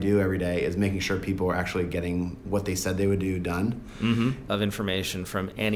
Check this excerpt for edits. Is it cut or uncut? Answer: cut